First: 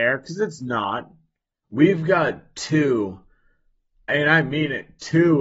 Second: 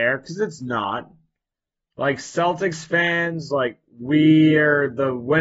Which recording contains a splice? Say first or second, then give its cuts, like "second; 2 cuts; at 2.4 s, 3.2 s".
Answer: first; 2 cuts; at 1.6 s, 4.1 s